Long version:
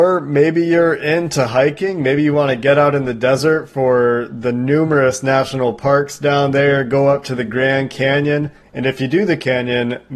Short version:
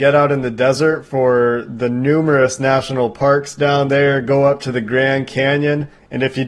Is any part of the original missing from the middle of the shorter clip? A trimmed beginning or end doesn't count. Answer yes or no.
no